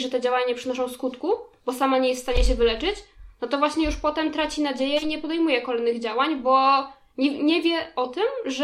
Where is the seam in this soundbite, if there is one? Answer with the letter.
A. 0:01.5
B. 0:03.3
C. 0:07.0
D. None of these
D